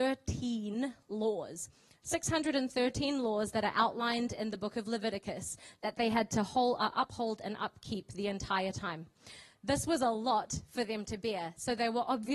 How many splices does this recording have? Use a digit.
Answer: 0